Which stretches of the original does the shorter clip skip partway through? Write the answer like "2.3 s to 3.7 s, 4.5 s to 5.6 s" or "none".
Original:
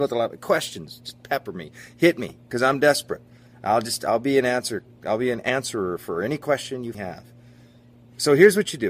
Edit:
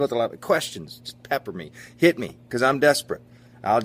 none